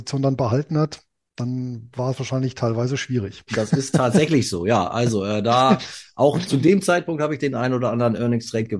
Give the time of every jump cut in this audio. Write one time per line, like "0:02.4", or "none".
0:03.5